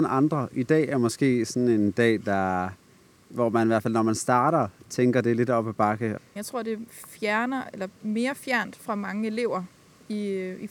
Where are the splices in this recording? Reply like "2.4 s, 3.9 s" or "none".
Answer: 6.4 s